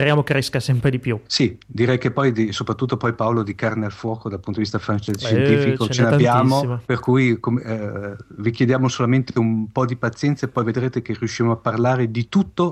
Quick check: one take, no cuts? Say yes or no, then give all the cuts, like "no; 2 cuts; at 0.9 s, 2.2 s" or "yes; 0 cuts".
no; 2 cuts; at 1.3 s, 6.8 s